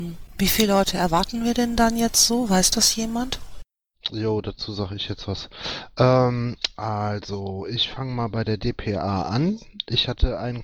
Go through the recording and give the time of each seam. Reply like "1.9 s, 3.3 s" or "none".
none

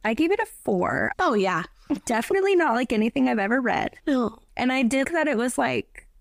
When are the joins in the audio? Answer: 1.1 s, 5.0 s

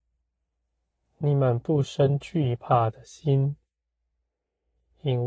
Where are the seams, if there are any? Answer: none

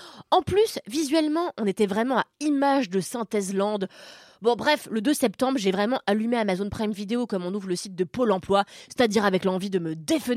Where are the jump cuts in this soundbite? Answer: none

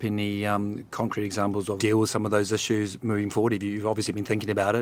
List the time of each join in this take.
1.8 s

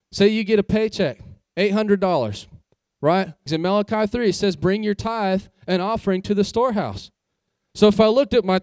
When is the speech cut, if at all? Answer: 3.5 s

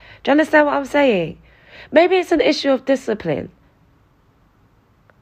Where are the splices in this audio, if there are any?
none

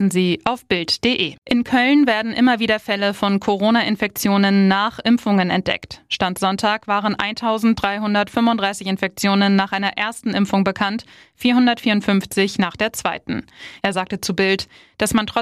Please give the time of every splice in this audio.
1.4 s, 13.8 s

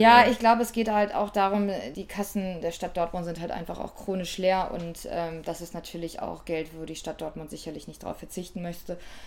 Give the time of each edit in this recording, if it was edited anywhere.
1.9 s

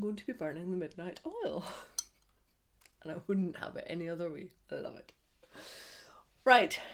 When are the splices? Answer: none

